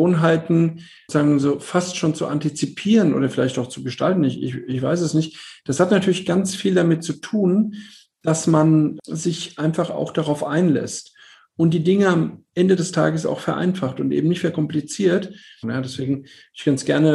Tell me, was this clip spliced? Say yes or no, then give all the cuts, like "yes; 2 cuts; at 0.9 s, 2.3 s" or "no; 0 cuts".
yes; 1 cut; at 15.6 s